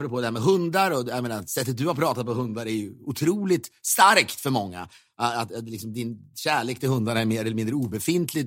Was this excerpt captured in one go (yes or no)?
yes